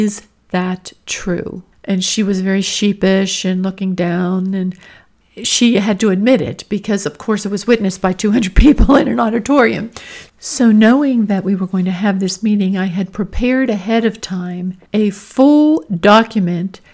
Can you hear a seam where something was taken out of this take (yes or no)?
yes